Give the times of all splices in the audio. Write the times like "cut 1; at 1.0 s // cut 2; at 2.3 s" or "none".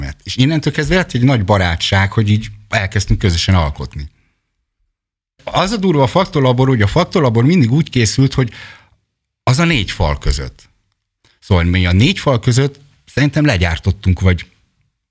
cut 1; at 5.4 s